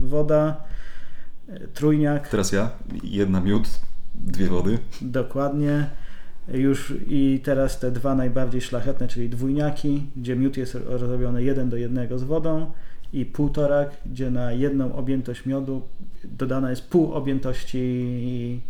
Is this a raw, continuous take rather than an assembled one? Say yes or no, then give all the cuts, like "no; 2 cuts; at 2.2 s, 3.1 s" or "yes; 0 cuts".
yes; 0 cuts